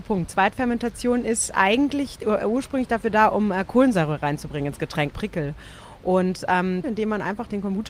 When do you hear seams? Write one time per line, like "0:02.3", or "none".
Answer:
0:05.1
0:06.8